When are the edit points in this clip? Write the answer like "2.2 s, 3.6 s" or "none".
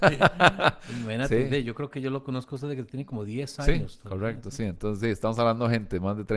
none